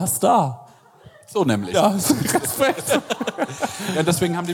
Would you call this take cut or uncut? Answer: uncut